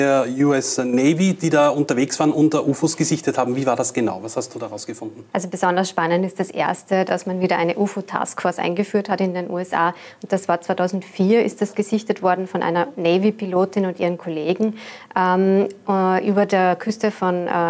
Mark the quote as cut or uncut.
cut